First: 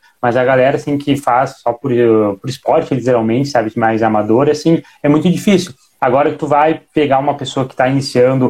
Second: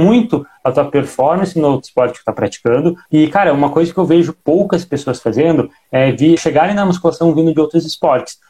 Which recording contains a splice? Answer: second; 2 cuts; at 3.1 s, 6.4 s

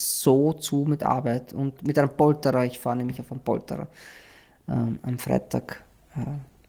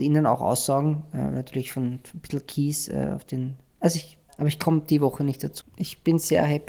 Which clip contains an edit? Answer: second; 2 cuts; at 4.3 s, 5.6 s

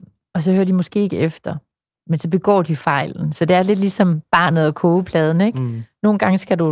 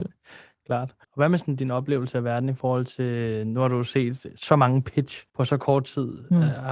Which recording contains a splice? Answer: second; 2 cuts; at 1.0 s, 5.3 s

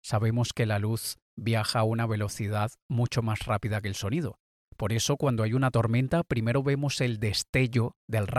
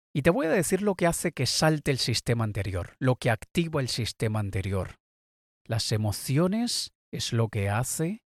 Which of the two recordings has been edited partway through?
second; 1 cut; at 5.5 s

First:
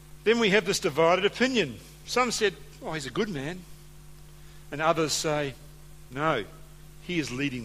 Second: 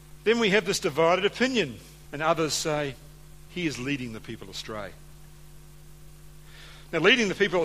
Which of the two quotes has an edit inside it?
second; 2 cuts; at 2.0 s, 3.5 s

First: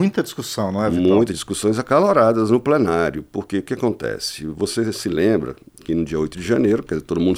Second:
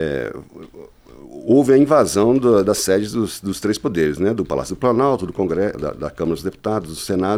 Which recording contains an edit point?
second; 1 cut; at 5.7 s

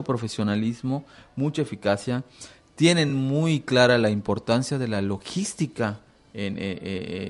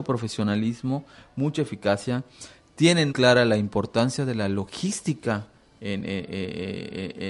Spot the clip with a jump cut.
second; 1 cut; at 3.1 s

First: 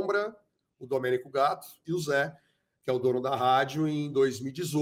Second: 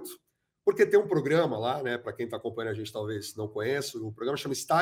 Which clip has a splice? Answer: first; 1 cut; at 1.8 s

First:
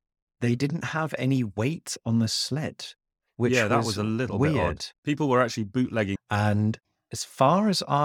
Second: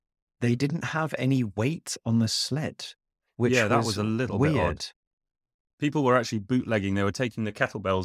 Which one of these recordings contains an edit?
first; 2 cuts; at 5.0 s, 6.2 s

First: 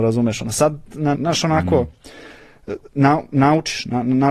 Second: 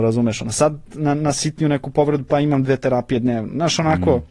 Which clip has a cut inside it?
first; 1 cut; at 1.1 s

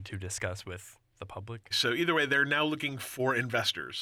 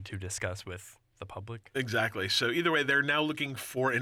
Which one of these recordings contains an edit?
first; 1 cut; at 1.7 s

